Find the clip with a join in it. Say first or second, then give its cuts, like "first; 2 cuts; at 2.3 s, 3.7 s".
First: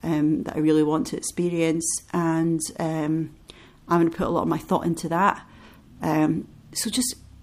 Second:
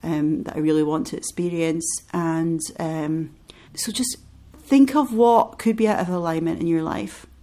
second; 1 cut; at 3.7 s